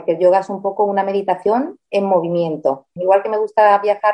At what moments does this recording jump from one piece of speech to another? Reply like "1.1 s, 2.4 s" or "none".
3.0 s